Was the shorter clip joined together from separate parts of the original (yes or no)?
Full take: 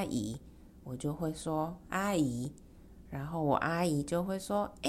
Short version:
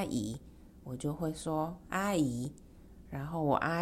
no